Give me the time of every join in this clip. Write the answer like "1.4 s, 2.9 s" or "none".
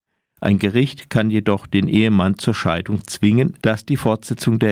3.6 s